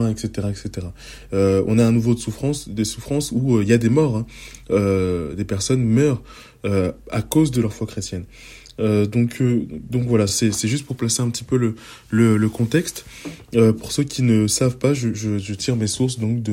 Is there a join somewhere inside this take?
no; 0 cuts

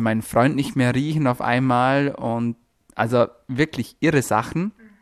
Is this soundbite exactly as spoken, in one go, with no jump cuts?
yes; 0 cuts

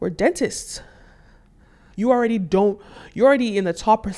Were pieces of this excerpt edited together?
yes; 1 cut; at 1.9 s

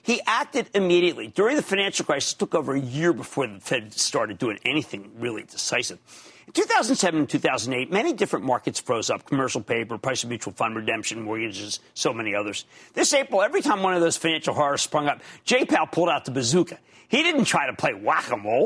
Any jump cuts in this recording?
no; 0 cuts

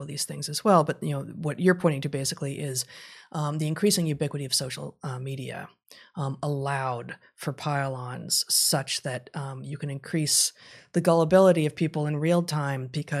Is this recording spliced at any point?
no; 0 cuts

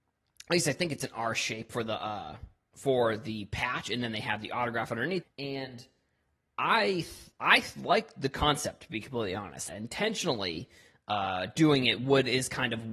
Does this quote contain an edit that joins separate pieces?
yes; 2 cuts; at 5.2 s, 9.7 s

